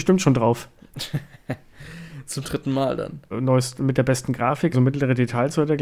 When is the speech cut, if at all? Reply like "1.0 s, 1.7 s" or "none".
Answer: 3.3 s, 4.7 s

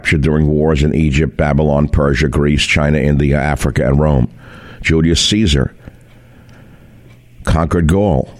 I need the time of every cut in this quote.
none

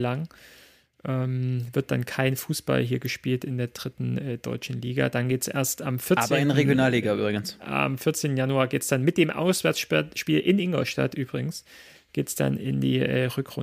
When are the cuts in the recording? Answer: none

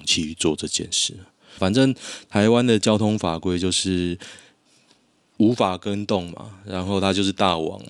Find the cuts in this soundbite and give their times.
1.6 s

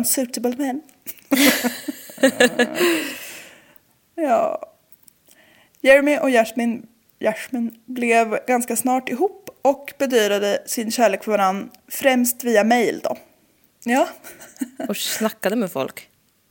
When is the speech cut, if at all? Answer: 13.7 s

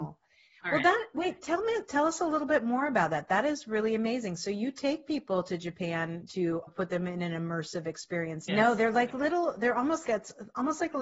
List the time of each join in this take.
6.7 s, 8.5 s, 10.0 s

